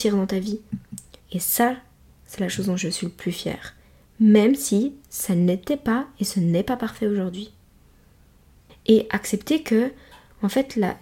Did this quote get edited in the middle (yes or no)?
yes